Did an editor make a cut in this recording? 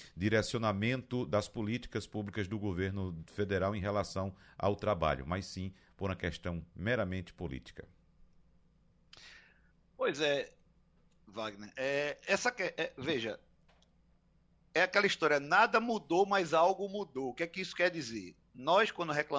no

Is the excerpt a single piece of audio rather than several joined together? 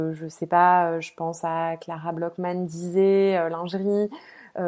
yes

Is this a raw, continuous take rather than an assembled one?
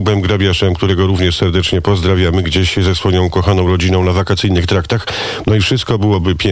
no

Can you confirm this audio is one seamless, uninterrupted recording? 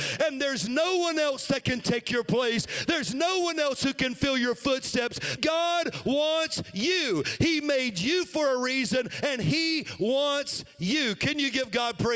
no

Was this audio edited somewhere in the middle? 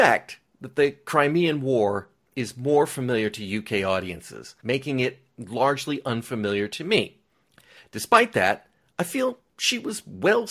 yes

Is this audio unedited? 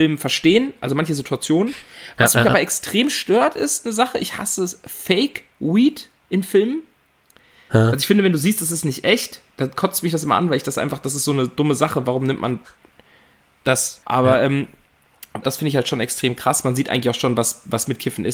no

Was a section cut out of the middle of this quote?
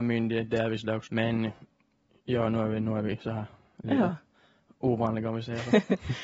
yes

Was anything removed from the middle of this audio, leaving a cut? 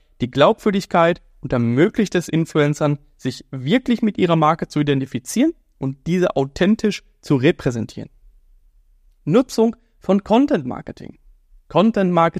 no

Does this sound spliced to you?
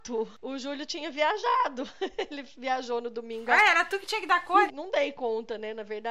yes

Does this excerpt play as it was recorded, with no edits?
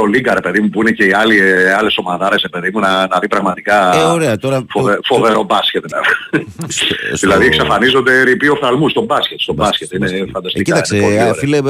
no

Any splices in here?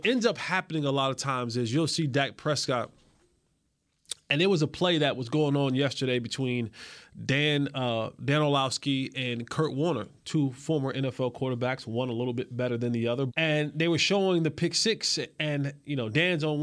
yes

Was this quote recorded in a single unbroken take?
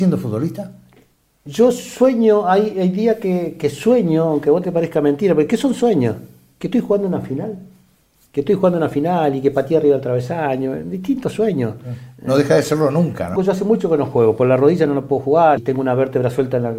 no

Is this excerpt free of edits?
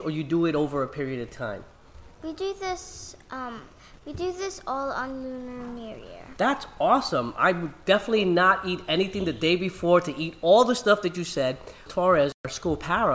no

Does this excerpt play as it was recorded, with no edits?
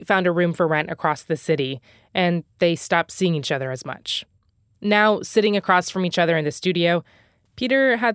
yes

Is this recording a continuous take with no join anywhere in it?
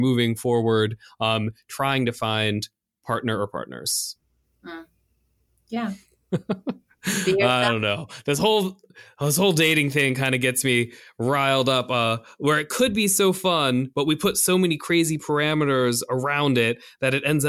yes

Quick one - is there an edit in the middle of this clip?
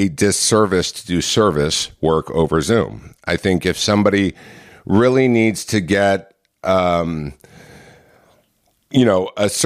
no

